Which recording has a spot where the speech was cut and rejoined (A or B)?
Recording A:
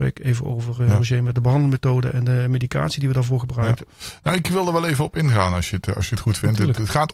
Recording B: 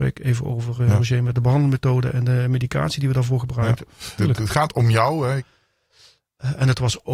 B